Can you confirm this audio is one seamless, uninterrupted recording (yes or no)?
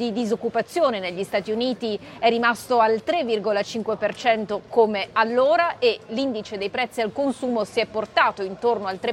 yes